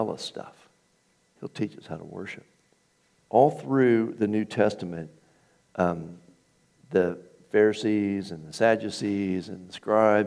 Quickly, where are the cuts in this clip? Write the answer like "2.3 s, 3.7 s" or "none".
3.2 s